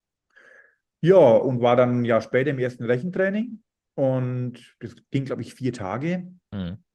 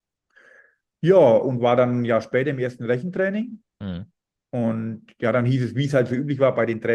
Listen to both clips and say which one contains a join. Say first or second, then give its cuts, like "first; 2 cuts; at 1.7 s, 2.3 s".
second; 1 cut; at 3.7 s